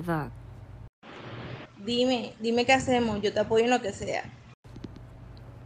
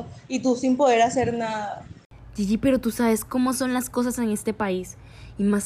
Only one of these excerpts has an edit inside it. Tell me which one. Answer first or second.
first